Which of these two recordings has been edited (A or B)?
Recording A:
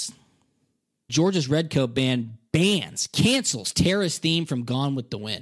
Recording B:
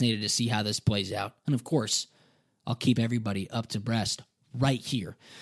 A